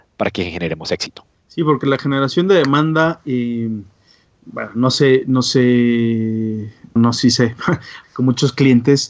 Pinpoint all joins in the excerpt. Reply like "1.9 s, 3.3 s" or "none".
1.3 s, 7.0 s, 8.0 s